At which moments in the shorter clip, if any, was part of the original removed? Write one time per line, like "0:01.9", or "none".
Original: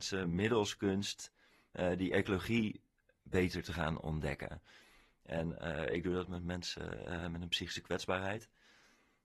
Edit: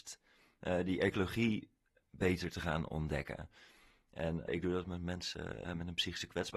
0:04.5
0:05.7